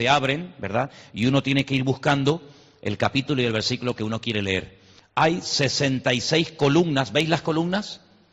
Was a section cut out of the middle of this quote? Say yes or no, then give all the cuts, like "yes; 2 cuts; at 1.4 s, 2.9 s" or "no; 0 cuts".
yes; 1 cut; at 5.0 s